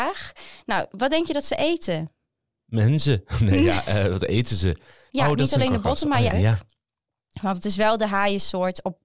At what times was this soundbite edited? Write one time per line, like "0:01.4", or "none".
0:05.1
0:06.3